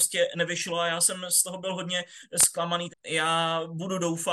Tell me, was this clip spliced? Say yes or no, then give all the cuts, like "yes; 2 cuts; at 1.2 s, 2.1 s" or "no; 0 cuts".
yes; 1 cut; at 2.9 s